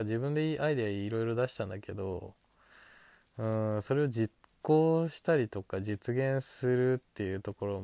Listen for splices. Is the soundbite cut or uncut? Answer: uncut